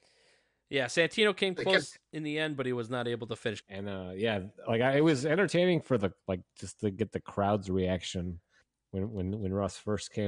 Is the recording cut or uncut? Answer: cut